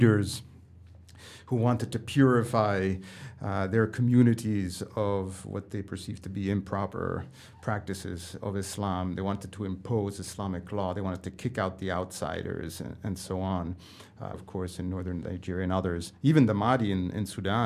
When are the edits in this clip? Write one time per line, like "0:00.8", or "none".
0:08.4
0:14.3